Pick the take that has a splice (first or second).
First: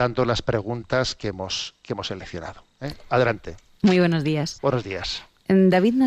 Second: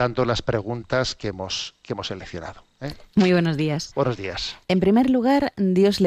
second